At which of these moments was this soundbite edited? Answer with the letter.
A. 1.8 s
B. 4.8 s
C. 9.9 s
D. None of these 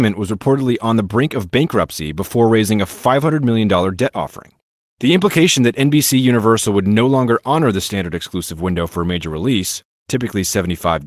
B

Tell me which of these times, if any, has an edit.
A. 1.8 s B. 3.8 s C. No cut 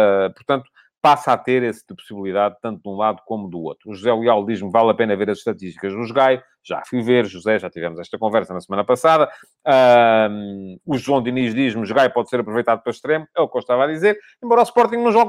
A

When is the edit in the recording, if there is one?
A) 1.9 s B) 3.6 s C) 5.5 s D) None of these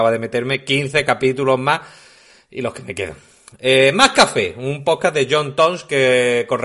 D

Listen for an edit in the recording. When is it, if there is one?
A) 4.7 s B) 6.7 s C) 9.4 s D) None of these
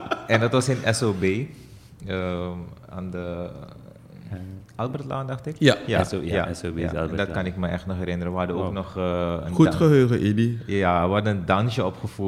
D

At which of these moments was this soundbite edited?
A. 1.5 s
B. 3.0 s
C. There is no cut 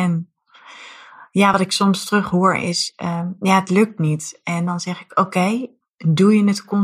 C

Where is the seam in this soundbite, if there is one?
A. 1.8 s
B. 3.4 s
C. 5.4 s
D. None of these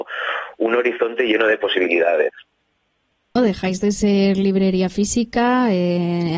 B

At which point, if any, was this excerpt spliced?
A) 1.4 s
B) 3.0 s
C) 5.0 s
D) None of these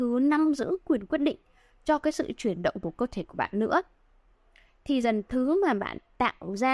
C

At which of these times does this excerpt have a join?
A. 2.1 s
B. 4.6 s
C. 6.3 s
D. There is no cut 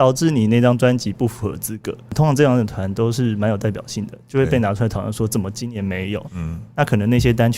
C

